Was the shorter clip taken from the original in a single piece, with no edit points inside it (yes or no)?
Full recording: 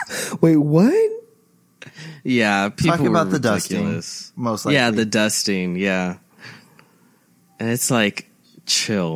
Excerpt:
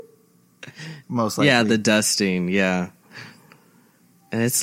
no